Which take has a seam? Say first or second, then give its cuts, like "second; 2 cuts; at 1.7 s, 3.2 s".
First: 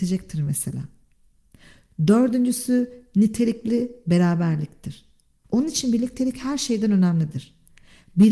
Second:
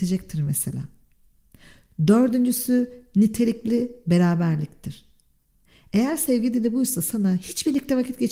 first; 1 cut; at 5.4 s